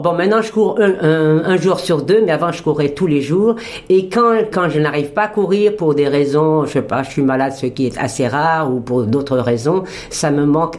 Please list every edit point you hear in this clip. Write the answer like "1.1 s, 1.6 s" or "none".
4.5 s